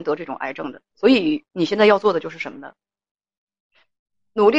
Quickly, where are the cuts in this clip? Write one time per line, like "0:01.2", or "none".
0:00.9